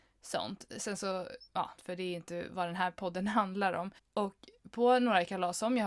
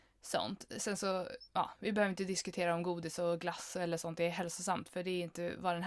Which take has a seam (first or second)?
first